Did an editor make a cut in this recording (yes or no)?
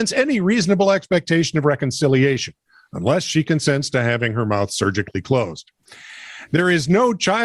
no